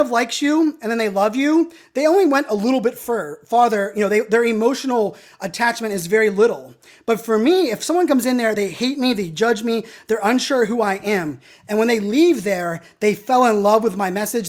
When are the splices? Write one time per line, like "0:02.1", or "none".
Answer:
none